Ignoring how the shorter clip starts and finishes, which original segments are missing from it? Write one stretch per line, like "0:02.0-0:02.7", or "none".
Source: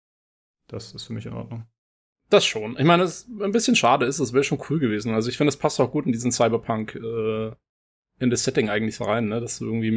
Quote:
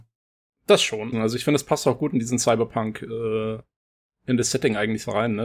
0:02.8-0:05.1